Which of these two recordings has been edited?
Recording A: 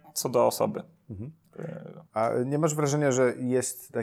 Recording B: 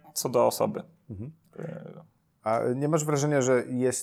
A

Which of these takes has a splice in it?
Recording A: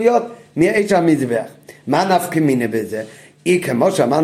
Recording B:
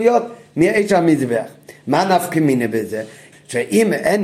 B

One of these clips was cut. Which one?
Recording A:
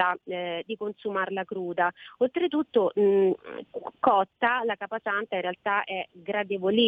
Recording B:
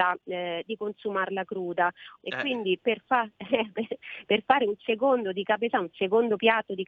B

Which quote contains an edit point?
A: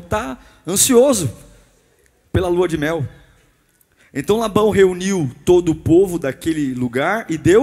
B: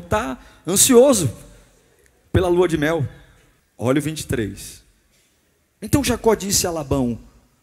B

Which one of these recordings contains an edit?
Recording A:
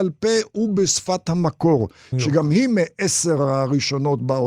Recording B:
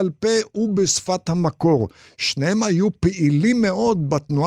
A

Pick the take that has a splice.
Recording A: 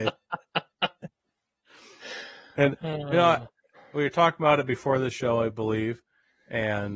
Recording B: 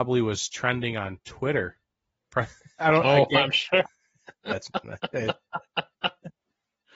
B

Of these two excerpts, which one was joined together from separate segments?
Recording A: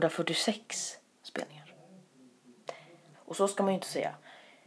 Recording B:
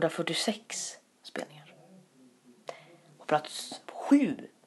A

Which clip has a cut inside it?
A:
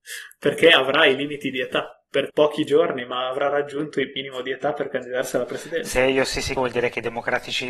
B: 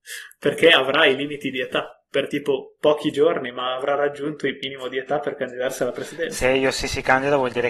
A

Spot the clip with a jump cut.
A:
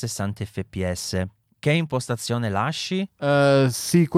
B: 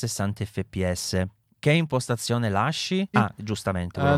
B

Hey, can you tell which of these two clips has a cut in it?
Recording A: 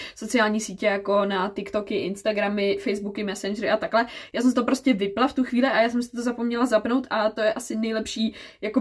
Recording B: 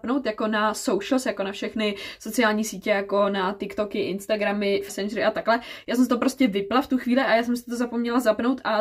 B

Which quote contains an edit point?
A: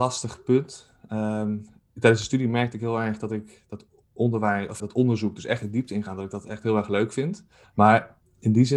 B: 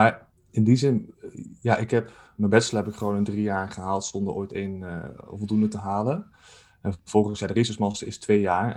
A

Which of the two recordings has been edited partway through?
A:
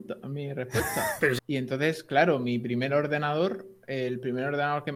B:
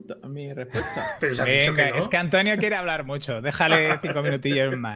A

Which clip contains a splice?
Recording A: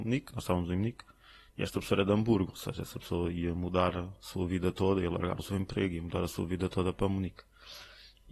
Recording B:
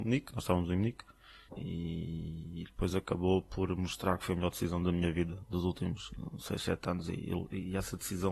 B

